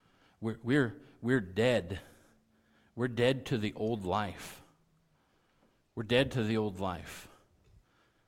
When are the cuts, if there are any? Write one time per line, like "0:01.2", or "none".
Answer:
none